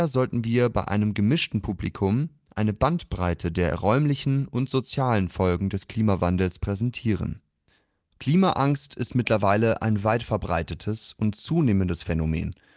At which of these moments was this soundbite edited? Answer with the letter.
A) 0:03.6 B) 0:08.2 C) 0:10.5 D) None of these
B